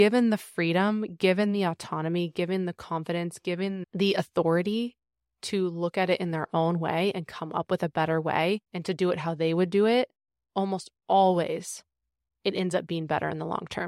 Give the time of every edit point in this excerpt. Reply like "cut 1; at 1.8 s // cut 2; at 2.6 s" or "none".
cut 1; at 8.7 s